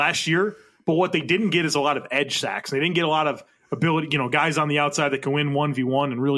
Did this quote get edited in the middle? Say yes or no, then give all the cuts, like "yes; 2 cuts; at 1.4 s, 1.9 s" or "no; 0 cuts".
no; 0 cuts